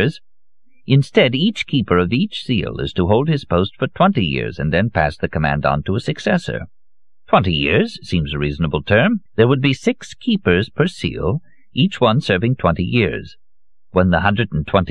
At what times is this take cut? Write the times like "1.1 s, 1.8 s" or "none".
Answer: 9.3 s